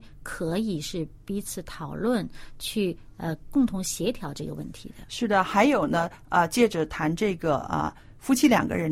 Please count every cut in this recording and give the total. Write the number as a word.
zero